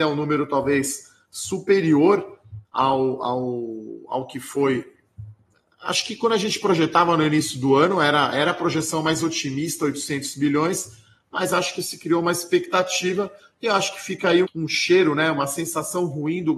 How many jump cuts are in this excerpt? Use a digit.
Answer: 1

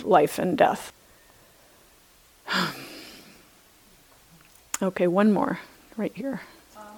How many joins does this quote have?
1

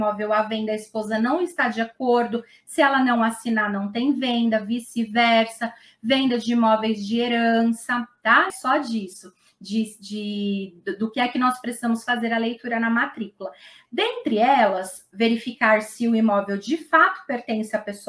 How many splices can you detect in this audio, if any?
1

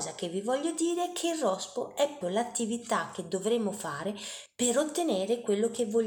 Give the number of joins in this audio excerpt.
1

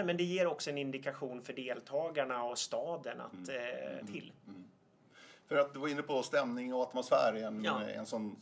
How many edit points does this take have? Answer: 1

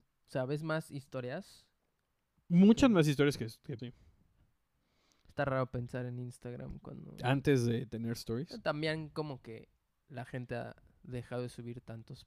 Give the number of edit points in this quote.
1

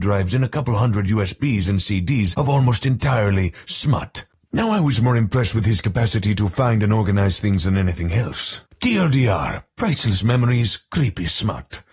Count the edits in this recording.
1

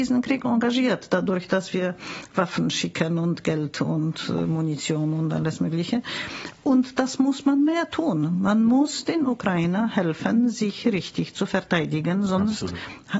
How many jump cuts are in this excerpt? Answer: 0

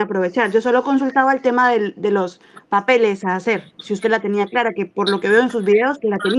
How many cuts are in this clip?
0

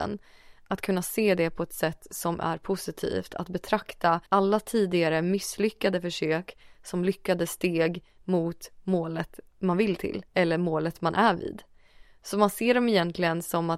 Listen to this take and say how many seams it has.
2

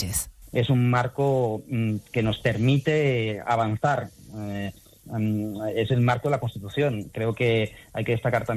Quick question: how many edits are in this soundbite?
0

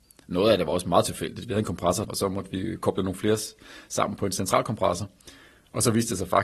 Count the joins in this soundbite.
1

